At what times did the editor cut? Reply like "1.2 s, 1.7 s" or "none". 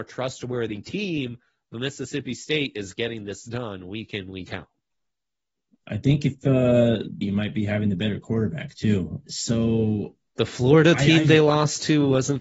7.2 s, 9.3 s